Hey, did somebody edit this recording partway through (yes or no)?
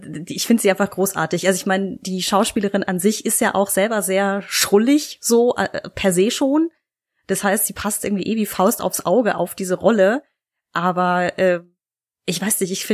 no